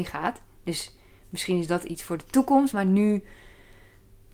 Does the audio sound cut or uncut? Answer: uncut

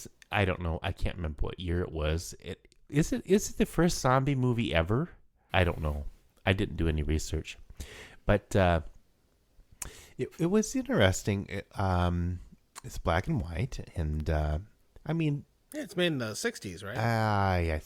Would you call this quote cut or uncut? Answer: cut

